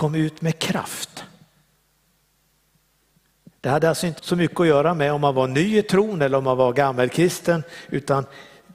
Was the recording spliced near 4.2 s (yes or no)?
yes